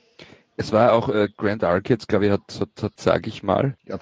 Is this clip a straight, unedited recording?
no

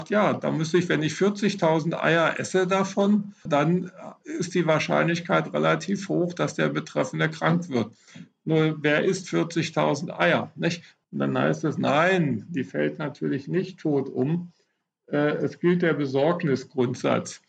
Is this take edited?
yes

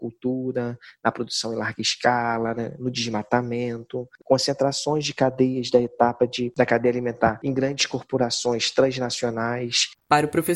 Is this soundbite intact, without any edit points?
no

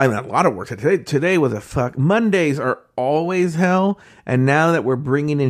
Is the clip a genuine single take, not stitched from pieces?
yes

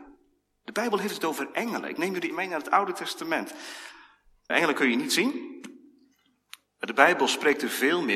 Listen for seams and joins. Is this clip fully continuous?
no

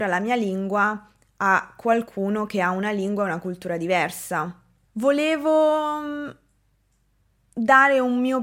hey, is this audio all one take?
no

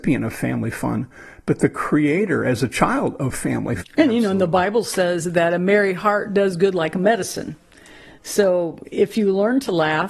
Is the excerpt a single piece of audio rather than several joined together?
no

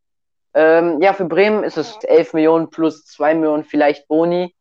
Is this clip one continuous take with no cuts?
no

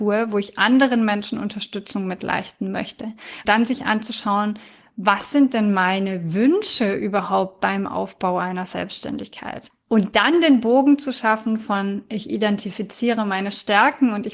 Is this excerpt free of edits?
no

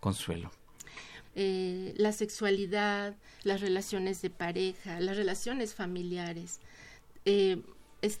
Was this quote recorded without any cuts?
no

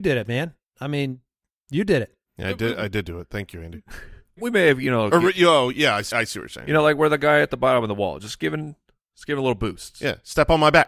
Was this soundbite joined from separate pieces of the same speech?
yes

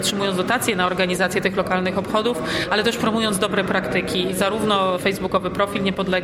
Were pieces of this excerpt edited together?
no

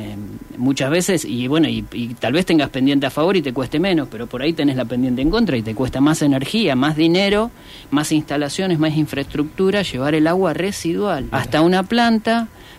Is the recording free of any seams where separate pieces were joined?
no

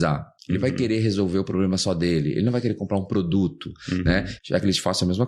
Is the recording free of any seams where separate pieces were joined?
no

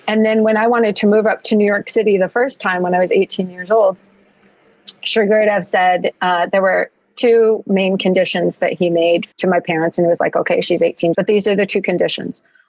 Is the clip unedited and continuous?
no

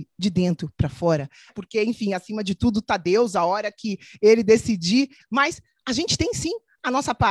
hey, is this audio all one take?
no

